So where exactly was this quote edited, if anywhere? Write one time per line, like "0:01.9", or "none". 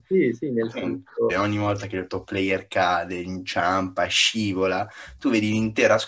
0:01.3